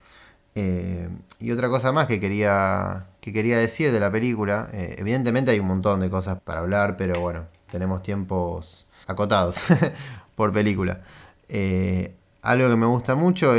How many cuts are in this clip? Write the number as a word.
two